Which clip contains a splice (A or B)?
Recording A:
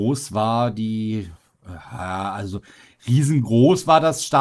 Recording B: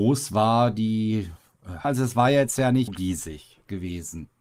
B